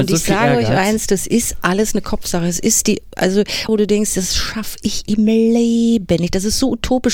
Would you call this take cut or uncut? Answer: cut